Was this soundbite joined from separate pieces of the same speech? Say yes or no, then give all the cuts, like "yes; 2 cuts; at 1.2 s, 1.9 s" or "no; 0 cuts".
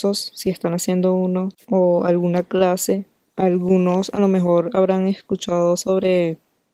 yes; 1 cut; at 3.2 s